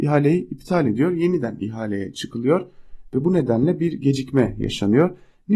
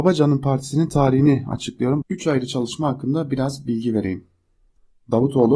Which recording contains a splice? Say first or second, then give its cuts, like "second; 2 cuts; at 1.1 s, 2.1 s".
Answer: second; 1 cut; at 2.0 s